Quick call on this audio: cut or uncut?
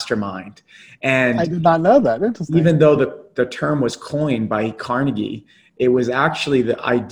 uncut